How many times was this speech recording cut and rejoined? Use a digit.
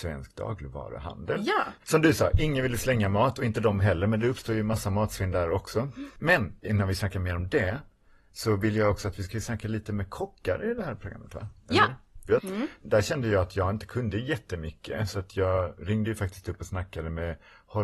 2